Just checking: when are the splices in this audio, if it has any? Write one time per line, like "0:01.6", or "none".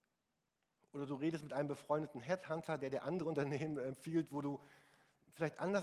none